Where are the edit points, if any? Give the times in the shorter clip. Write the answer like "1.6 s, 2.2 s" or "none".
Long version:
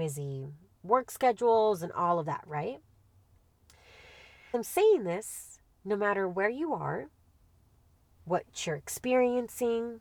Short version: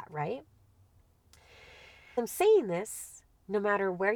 none